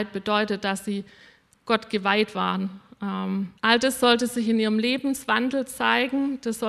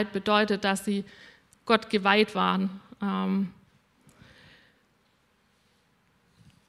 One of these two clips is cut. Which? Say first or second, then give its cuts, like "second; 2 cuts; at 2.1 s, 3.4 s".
first; 1 cut; at 3.6 s